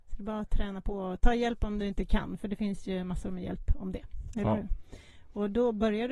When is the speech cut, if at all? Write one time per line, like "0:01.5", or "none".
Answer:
0:04.3